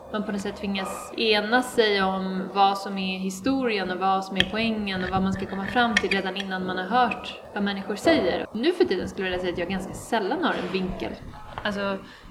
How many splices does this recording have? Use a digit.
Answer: 1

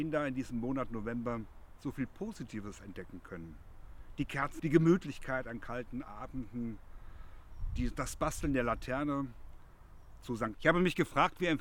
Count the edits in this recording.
2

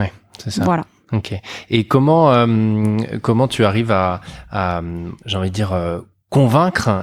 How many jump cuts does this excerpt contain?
0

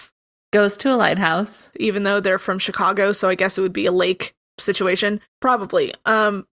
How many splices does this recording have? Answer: 2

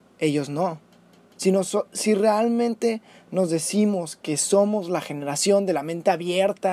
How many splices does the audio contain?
1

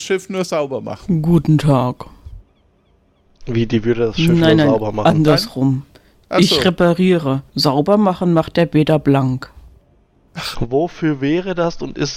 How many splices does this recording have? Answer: 2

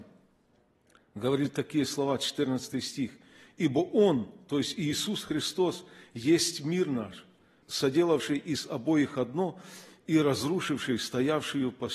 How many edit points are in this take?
1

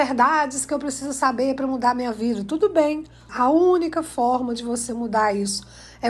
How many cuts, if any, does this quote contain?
1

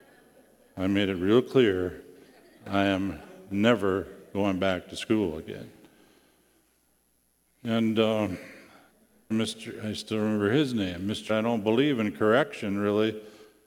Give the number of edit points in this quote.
3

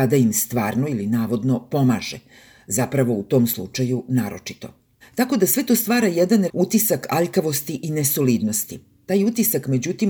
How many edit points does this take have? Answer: 2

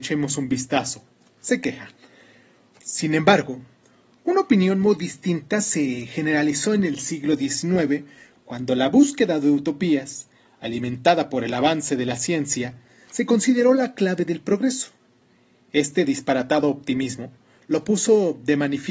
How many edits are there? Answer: 1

